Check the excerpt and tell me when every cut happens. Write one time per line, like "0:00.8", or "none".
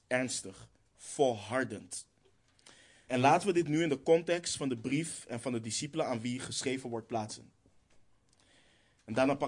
0:00.9
0:03.1